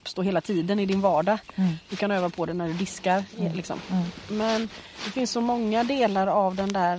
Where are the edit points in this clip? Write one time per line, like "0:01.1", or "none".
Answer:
none